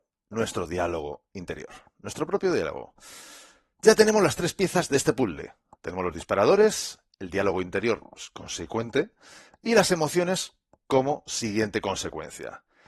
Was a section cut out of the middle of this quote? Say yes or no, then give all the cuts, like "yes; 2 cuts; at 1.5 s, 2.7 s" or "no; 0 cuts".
no; 0 cuts